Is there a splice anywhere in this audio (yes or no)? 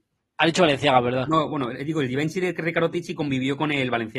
no